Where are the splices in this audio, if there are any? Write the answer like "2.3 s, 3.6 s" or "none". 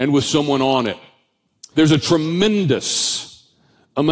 1.7 s